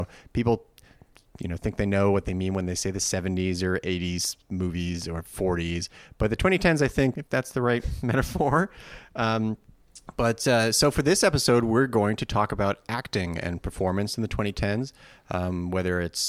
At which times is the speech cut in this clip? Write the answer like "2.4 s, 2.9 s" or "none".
7.1 s